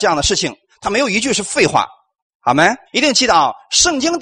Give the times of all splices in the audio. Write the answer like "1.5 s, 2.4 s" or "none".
2.9 s